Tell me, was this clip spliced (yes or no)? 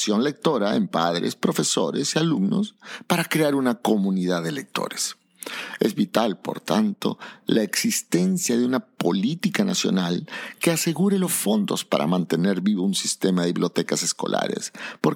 no